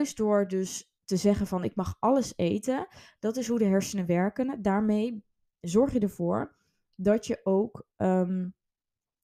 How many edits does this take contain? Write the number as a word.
zero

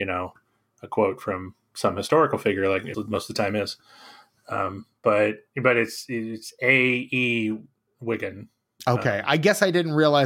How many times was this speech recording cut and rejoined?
one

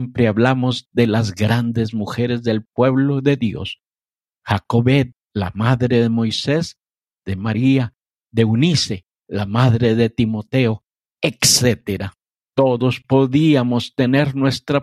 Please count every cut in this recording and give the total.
two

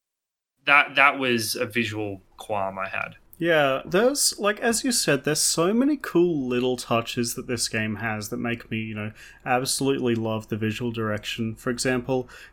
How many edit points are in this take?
zero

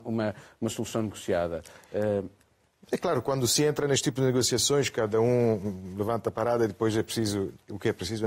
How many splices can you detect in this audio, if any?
zero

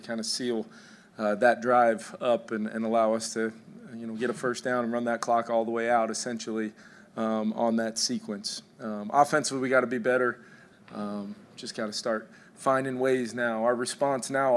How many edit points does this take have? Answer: one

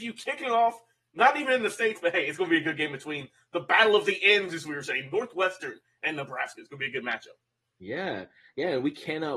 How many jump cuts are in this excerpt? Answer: zero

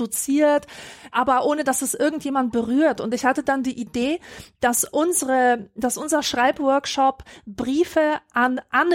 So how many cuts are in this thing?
one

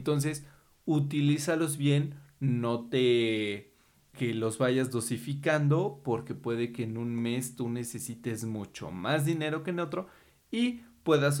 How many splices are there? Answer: one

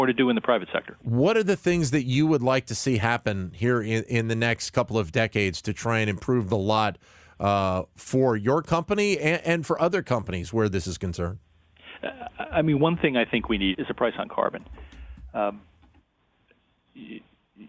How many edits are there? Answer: one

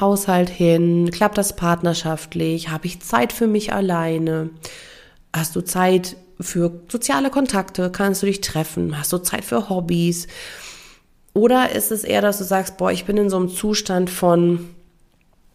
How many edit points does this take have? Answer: zero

